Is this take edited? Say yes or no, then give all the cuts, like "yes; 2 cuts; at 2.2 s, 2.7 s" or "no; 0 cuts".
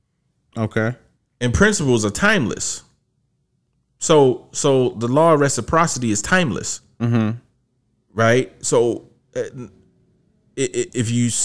no; 0 cuts